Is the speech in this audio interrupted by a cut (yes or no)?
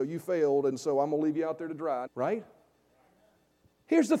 yes